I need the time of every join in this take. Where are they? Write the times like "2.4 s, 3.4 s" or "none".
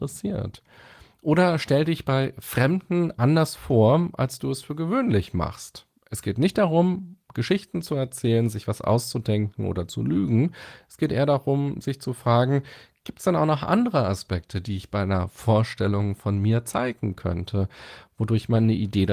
none